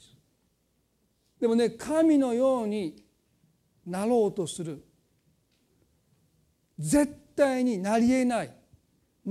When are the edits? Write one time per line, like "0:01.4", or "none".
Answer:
0:01.3